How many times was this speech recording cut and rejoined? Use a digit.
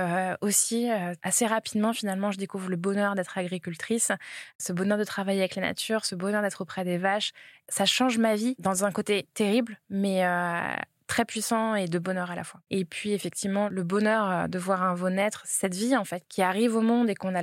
2